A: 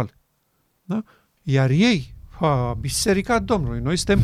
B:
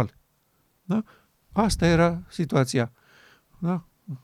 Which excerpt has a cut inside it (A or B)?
A